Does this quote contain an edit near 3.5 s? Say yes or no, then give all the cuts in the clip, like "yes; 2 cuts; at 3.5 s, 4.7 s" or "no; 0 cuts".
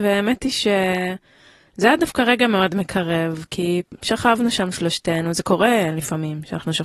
no; 0 cuts